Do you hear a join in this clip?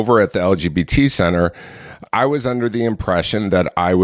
yes; 1 cut; at 2.0 s

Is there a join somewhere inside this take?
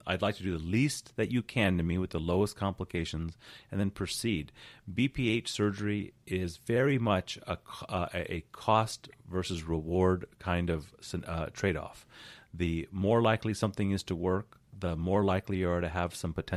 yes; 1 cut; at 14.7 s

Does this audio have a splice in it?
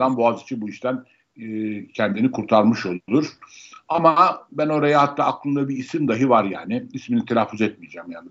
no; 0 cuts

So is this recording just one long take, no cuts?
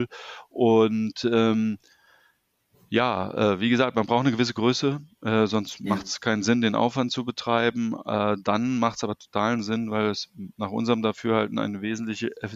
yes; 0 cuts

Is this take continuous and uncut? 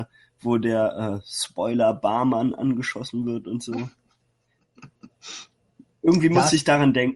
yes; 0 cuts

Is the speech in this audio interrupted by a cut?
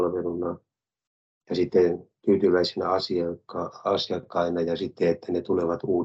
no; 0 cuts

